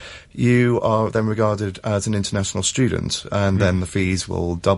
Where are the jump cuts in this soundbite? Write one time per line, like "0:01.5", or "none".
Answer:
none